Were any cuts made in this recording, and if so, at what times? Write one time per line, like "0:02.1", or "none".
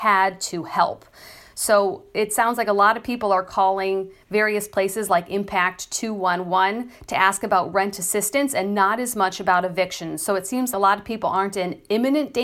0:10.7

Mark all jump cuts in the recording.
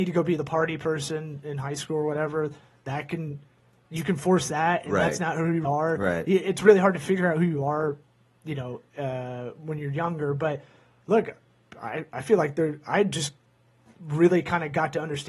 0:05.6

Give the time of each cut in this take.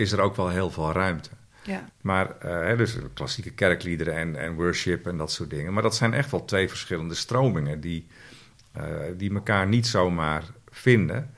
0:01.9

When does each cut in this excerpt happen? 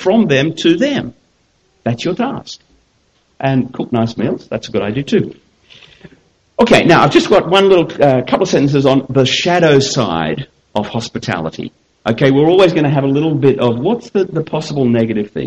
none

